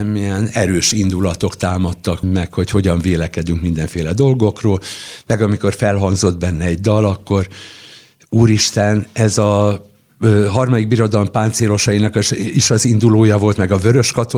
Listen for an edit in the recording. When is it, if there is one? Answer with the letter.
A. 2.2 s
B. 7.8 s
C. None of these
A